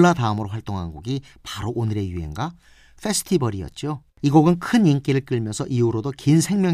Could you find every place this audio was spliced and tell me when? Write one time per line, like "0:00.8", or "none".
0:04.1